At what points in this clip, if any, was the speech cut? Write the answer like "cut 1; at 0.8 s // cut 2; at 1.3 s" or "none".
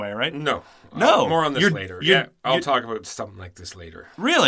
none